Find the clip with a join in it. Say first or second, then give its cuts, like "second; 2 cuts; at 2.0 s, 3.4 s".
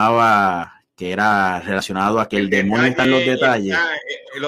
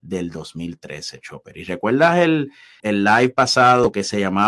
second; 1 cut; at 2.8 s